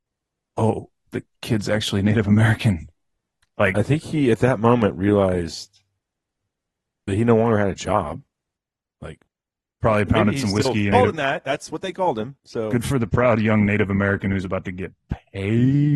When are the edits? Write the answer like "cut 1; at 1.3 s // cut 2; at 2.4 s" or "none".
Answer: cut 1; at 10.9 s